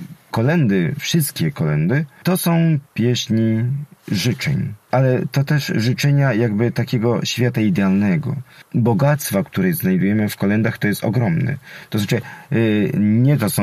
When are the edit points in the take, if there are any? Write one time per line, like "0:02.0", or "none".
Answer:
0:02.9